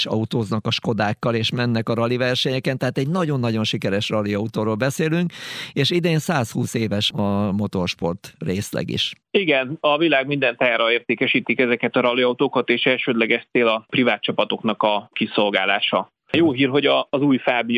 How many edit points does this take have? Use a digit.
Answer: 1